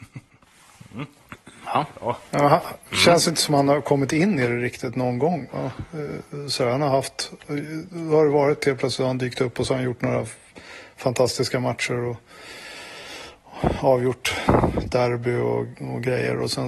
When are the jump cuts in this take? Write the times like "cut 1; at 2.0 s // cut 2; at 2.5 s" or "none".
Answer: none